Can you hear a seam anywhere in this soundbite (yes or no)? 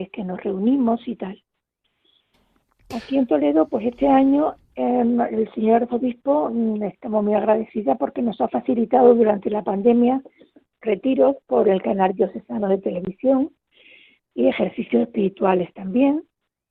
yes